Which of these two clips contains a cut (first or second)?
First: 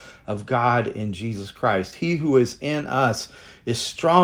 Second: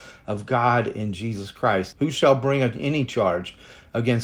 second